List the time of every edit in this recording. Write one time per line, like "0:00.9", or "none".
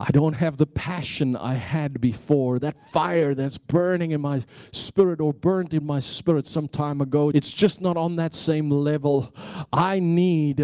0:02.6
0:07.3